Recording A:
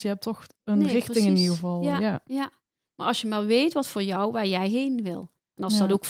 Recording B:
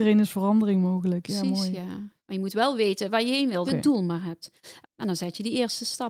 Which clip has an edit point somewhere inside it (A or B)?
B